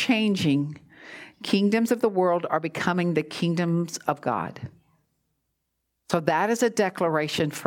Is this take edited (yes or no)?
no